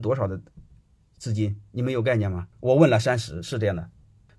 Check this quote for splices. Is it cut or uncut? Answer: uncut